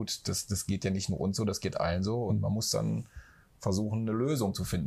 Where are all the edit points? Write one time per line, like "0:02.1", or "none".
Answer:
none